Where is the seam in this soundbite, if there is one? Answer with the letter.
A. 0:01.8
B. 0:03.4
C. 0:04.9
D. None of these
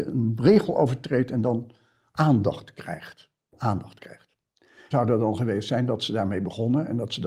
C